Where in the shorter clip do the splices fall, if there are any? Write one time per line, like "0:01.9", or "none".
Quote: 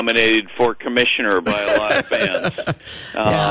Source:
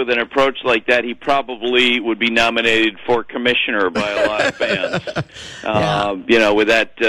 none